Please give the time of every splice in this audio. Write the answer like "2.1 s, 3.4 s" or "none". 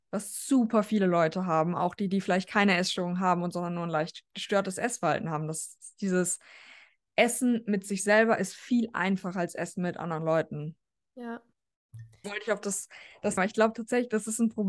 12.2 s, 13.4 s